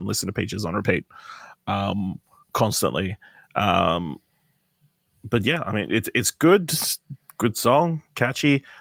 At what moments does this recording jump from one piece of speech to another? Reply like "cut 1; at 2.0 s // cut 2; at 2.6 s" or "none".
none